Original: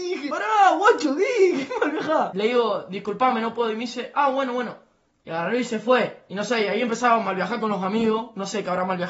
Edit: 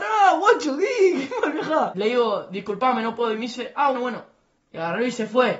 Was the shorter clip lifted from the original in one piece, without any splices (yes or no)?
no